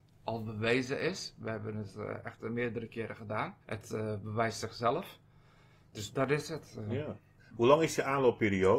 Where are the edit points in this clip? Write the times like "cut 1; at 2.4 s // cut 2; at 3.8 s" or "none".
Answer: cut 1; at 3.6 s